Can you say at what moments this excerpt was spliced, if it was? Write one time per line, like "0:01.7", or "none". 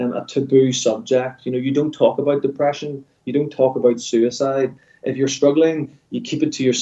none

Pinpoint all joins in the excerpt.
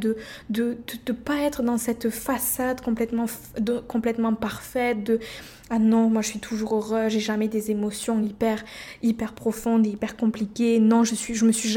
none

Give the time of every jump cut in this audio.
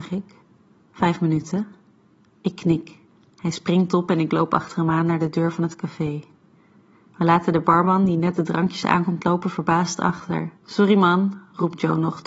0:02.3
0:10.6

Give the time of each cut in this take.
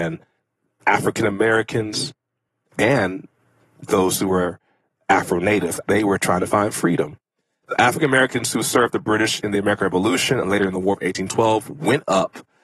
0:05.8

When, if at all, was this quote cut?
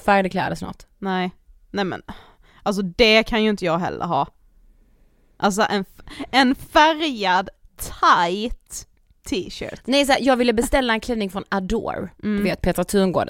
none

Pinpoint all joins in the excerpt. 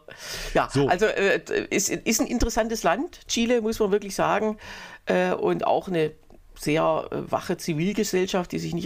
none

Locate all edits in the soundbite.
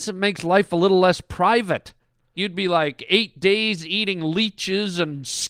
0:02.3

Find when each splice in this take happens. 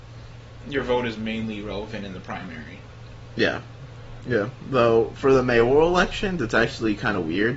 0:04.2

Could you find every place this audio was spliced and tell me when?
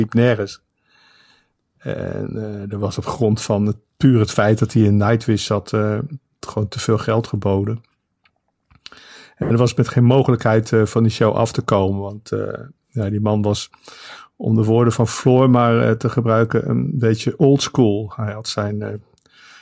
none

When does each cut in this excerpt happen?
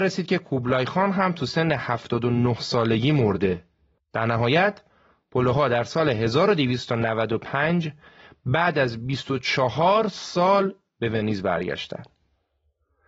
0:04.0

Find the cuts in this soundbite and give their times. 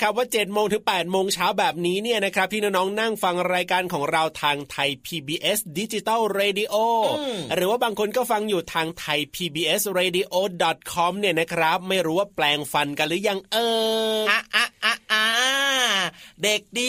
0:14.2

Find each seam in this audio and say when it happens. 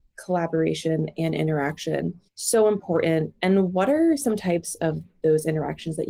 0:02.3

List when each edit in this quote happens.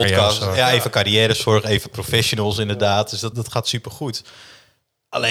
0:03.3

